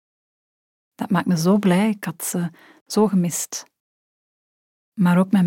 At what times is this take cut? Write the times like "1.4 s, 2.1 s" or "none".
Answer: none